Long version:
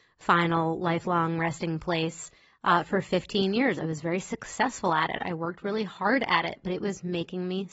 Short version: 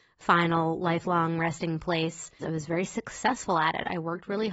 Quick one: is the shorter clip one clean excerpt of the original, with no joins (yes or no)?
no